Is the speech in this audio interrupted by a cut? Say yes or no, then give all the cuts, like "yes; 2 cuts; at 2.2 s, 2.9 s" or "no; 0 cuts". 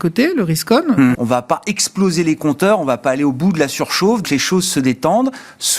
yes; 2 cuts; at 1.1 s, 4.2 s